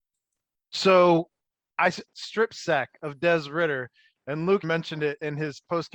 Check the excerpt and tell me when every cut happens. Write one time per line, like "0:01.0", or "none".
0:02.0
0:04.6